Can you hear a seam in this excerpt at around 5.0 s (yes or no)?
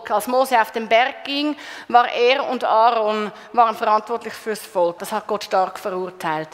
yes